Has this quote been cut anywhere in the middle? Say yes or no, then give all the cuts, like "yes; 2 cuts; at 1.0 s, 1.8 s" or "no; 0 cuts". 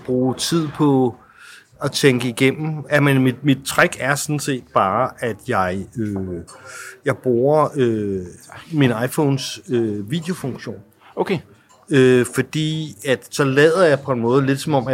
yes; 1 cut; at 2.8 s